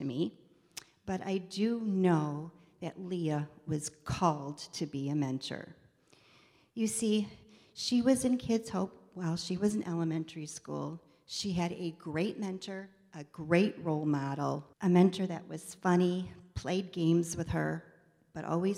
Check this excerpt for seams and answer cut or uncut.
cut